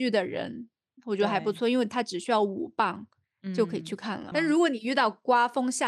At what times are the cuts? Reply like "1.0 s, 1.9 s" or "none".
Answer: 4.3 s